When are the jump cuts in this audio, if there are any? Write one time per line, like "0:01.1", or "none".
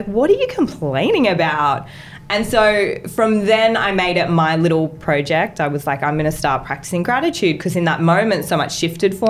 none